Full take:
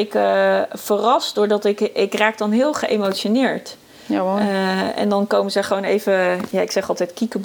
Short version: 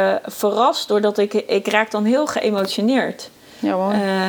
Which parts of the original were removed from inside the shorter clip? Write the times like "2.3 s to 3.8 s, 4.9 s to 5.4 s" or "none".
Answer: none

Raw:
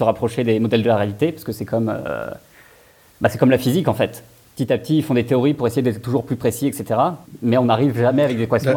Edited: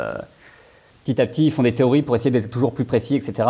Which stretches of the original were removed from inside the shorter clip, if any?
3.0 s to 4.4 s

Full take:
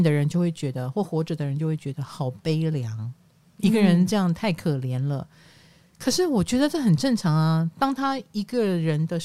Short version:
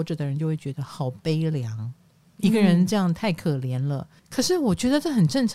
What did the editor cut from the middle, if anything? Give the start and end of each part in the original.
5.4 s to 5.9 s

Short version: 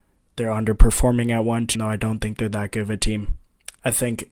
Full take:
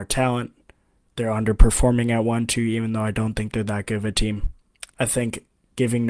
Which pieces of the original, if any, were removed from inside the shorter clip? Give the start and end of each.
2.5 s to 2.9 s

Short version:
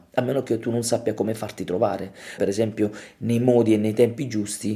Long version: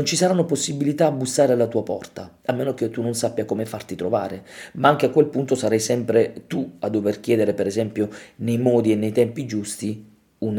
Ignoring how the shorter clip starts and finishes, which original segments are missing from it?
4.7 s to 7.6 s

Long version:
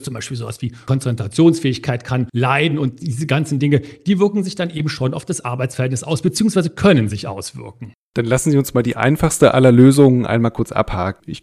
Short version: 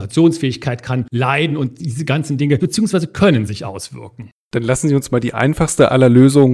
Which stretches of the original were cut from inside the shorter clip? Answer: 3.8 s to 6.2 s

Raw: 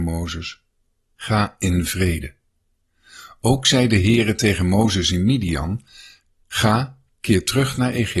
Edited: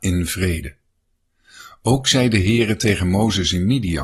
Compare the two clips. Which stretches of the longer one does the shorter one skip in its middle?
none

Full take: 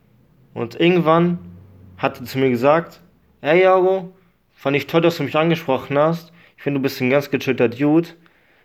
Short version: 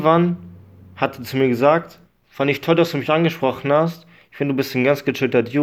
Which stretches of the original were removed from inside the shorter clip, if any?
3.1 s to 4.3 s

